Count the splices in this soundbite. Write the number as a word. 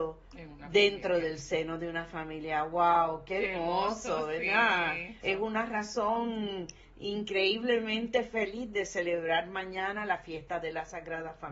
one